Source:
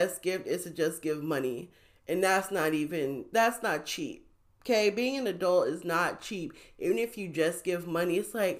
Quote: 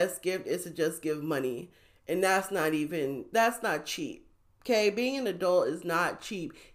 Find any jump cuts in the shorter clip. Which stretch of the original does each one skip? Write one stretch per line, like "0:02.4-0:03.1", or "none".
none